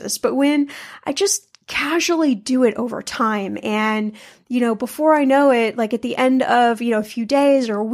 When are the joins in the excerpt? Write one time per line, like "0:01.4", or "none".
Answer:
none